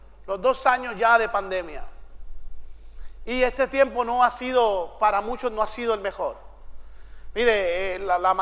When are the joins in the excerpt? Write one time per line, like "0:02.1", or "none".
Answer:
none